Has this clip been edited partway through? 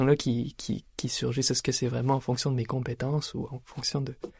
no; 0 cuts

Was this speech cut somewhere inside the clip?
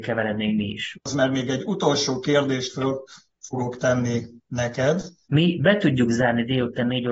yes; 2 cuts; at 0.9 s, 5.2 s

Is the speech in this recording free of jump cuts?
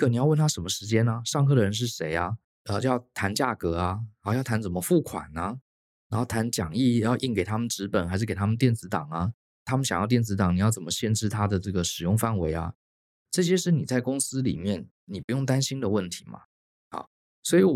yes; 0 cuts

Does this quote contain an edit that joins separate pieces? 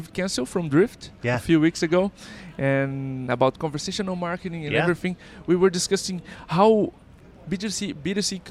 yes; 1 cut; at 7.4 s

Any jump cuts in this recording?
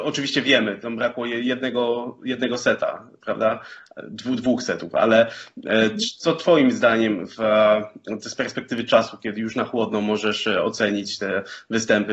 no; 0 cuts

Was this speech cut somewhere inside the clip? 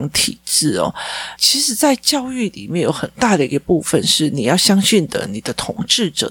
yes; 1 cut; at 1.4 s

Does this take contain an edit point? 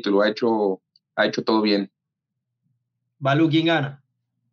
no; 0 cuts

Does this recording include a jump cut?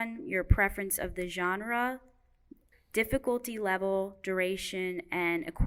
yes; 1 cut; at 2.7 s

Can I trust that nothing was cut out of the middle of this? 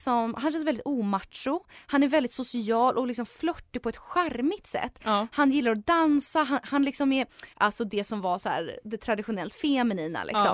no; 1 cut; at 7.5 s

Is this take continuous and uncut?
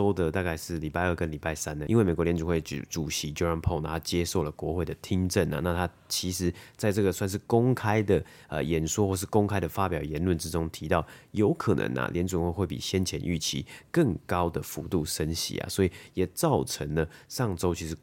yes; 0 cuts

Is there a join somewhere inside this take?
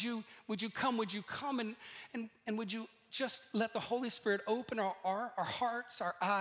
no; 0 cuts

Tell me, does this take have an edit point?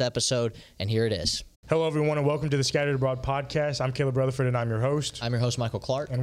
yes; 1 cut; at 1.6 s

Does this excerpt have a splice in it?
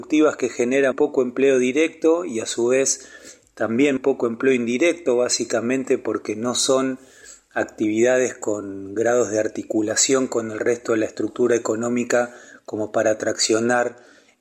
yes; 2 cuts; at 0.9 s, 4.0 s

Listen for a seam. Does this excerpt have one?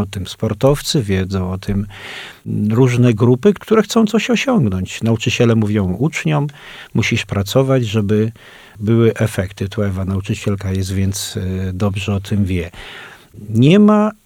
no; 0 cuts

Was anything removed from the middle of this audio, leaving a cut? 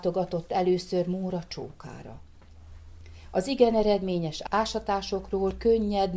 no; 0 cuts

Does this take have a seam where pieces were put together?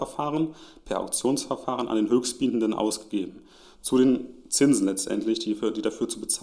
no; 0 cuts

